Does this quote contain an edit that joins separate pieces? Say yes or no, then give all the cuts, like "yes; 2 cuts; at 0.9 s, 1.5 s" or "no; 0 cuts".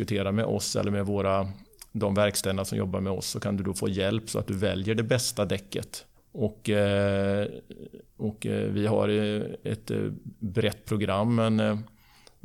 yes; 1 cut; at 6.2 s